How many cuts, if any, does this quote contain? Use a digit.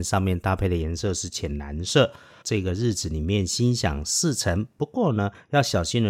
1